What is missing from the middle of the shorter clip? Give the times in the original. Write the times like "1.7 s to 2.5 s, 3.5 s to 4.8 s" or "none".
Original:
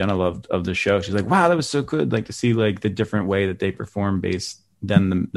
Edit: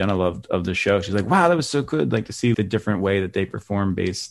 2.5 s to 2.8 s